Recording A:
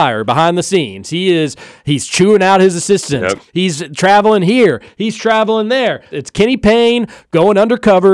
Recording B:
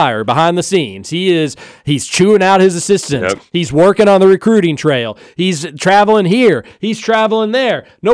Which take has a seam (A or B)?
A